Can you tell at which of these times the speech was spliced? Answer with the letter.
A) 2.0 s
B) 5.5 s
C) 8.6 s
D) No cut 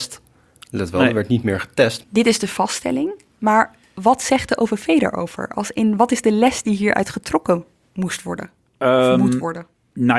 A